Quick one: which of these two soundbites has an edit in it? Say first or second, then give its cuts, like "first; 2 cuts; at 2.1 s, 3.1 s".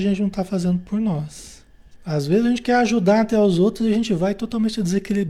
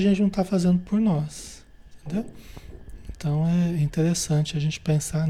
first; 1 cut; at 2.0 s